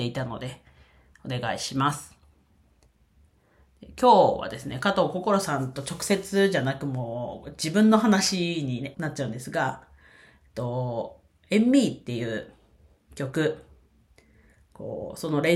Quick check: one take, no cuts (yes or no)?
no